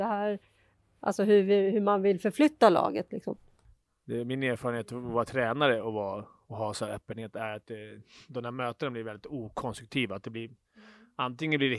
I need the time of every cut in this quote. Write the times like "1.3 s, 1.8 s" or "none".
none